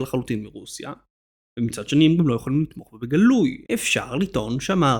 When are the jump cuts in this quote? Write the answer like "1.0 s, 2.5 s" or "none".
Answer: 3.7 s